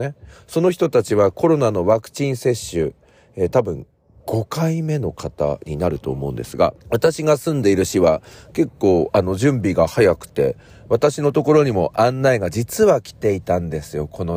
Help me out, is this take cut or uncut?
cut